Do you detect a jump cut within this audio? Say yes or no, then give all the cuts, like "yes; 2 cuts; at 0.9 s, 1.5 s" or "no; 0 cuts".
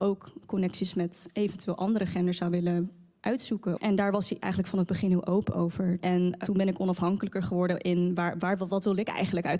yes; 2 cuts; at 3.8 s, 6.0 s